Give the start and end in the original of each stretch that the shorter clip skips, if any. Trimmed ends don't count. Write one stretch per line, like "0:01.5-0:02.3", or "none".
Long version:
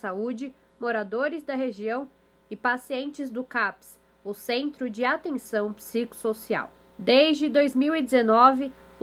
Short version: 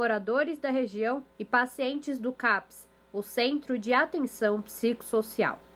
0:02.1-0:02.4